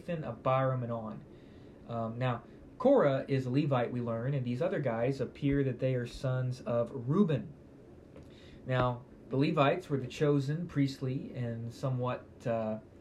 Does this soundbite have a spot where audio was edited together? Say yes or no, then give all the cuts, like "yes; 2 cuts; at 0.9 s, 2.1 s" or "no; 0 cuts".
no; 0 cuts